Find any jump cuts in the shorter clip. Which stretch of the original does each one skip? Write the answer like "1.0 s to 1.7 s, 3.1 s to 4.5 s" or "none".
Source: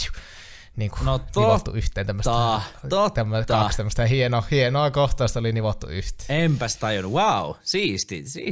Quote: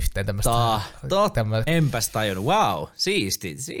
3.5 s to 6.3 s